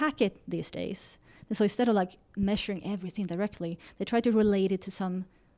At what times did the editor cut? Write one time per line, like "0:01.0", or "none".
none